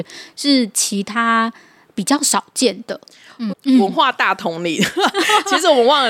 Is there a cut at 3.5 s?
yes; 1 cut; at 3.5 s

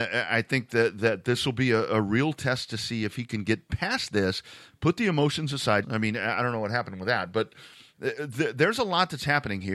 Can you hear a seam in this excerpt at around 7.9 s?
no; 1 cut; at 5.8 s

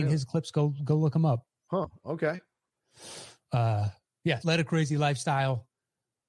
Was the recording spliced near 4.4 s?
yes; 1 cut; at 4.4 s

